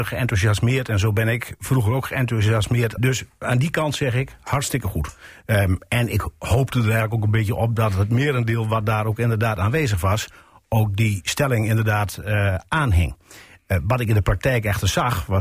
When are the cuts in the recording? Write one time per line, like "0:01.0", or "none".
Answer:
0:03.0